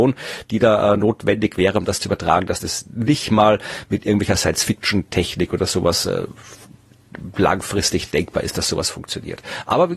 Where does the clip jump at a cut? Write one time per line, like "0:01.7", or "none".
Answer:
none